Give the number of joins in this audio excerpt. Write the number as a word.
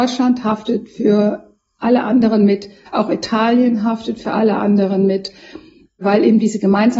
one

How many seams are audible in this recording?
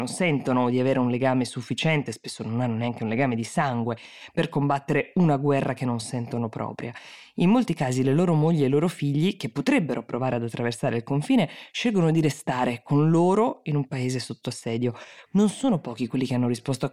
one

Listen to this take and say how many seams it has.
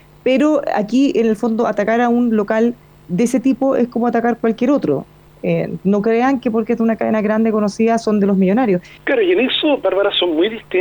one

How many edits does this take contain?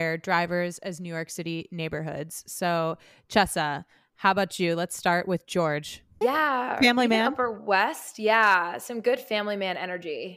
one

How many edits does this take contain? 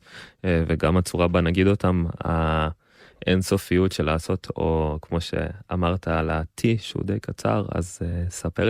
one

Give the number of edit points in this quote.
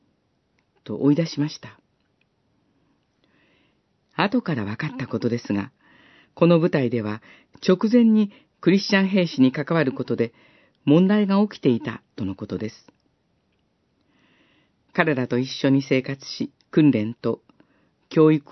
two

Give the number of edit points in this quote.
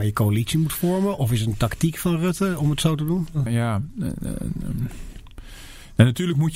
one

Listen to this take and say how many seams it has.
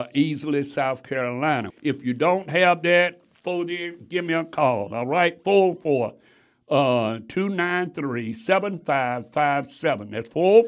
one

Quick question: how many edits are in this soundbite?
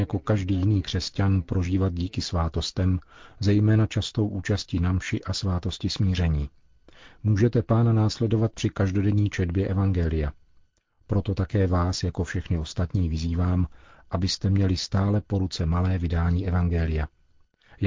zero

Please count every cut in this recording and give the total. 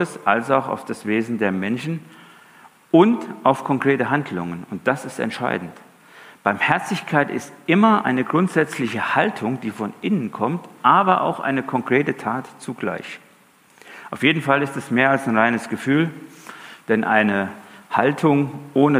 zero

